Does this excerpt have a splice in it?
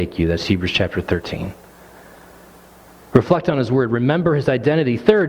no; 0 cuts

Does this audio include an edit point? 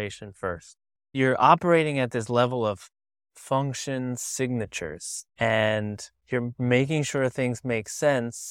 yes; 2 cuts; at 1.0 s, 5.3 s

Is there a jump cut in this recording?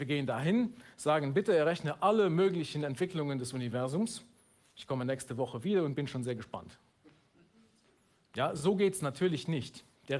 no; 0 cuts

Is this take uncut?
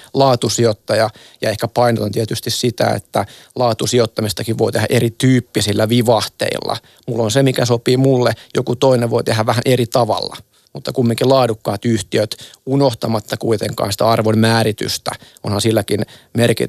yes; 0 cuts

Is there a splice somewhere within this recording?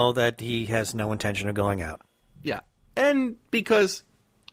no; 0 cuts

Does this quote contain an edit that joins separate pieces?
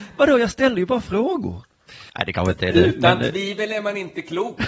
yes; 1 cut; at 2.1 s

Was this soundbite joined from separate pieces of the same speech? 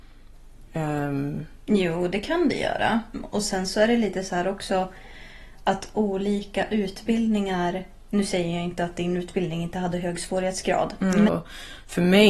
yes; 2 cuts; at 3.1 s, 11.3 s

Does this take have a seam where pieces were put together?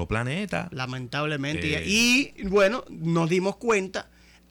no; 0 cuts

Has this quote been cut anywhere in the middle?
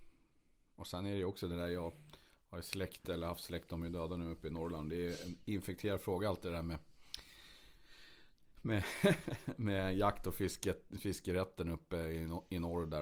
no; 0 cuts

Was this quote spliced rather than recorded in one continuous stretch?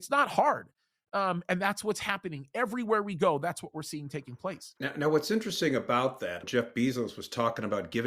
yes; 2 cuts; at 4.8 s, 6.4 s

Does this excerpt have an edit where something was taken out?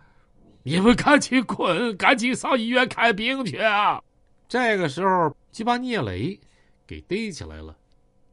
yes; 1 cut; at 5.3 s

